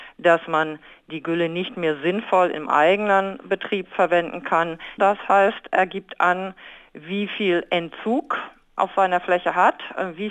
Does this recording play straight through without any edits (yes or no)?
no